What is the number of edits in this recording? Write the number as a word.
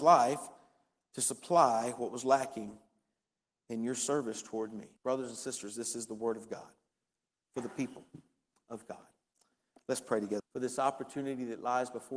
two